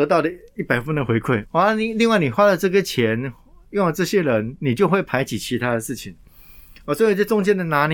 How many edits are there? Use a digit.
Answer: 1